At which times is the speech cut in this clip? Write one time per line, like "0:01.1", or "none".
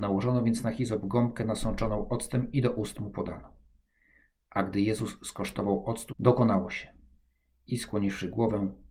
0:06.1